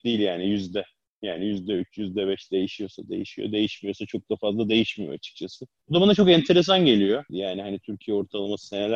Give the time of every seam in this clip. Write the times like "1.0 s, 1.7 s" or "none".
5.8 s, 7.3 s